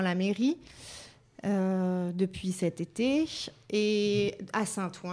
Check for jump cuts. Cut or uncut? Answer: uncut